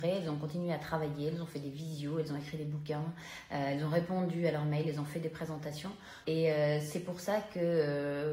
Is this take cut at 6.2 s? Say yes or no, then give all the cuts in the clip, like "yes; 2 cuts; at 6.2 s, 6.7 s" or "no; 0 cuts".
yes; 1 cut; at 6.2 s